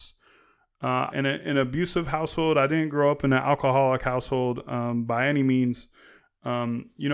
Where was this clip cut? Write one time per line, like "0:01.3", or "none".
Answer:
0:01.1